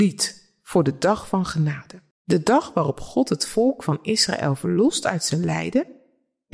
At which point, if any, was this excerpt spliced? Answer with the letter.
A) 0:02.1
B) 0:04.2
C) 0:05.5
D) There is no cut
A